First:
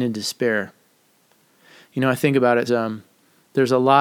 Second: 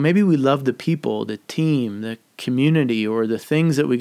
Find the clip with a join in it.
first; 1 cut; at 2.7 s

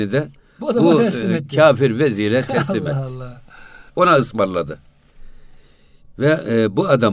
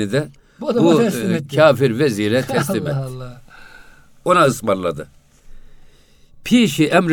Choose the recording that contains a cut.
first; 2 cuts; at 3.9 s, 6.1 s

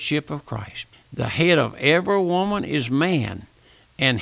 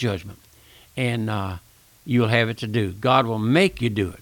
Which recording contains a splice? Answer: first; 1 cut; at 0.9 s

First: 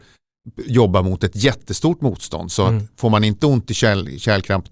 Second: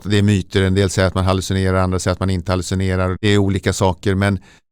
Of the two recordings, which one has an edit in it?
second; 1 cut; at 3.2 s

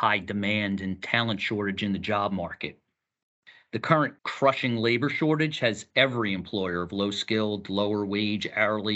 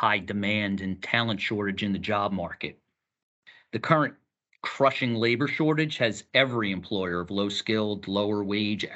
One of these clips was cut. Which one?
first; 1 cut; at 4.2 s

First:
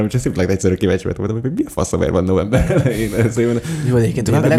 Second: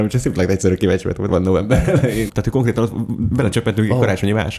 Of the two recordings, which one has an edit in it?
second; 2 cuts; at 1.3 s, 2.3 s

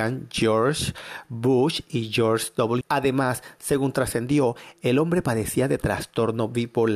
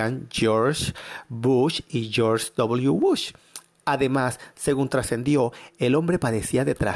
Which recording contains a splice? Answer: first; 1 cut; at 2.8 s

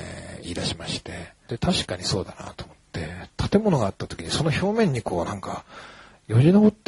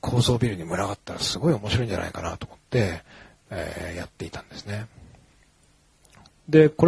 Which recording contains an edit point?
first; 1 cut; at 1.5 s

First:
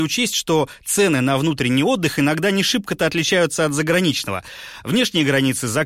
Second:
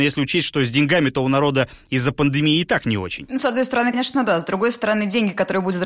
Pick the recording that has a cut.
second; 1 cut; at 3.9 s

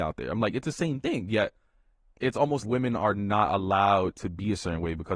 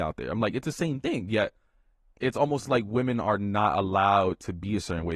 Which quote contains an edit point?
first; 1 cut; at 2.6 s

